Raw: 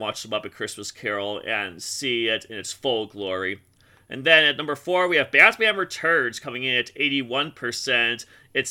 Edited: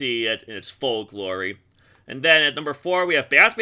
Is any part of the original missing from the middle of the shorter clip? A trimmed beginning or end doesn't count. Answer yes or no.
no